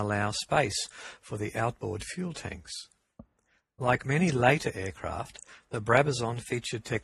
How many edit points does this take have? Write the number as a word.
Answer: zero